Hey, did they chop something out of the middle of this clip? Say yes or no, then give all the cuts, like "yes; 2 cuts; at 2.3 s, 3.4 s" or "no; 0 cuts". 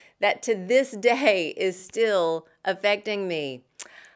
no; 0 cuts